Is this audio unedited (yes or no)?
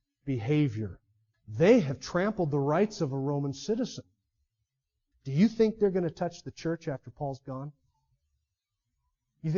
no